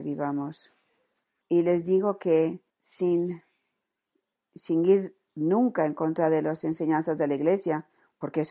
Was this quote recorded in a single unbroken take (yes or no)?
no